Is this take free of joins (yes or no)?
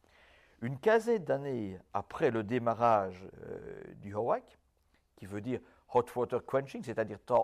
yes